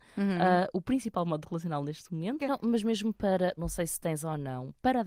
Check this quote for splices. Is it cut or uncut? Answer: cut